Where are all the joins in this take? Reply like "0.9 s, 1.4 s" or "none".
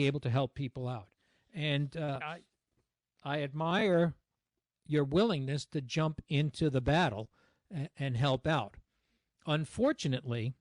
2.2 s